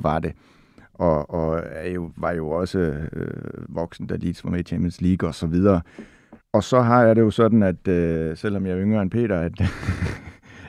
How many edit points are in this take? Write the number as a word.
one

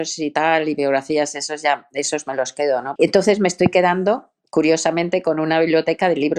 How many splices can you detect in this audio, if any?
one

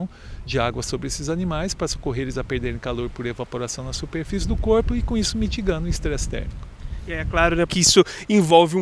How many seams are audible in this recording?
one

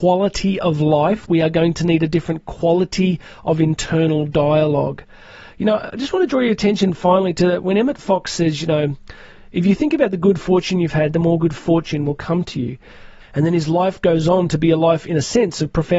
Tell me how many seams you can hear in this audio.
one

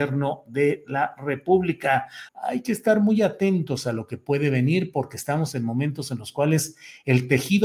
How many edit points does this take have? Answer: one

